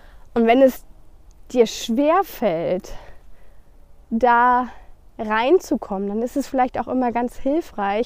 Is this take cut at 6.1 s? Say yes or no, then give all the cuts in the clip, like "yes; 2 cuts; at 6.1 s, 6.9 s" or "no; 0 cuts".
no; 0 cuts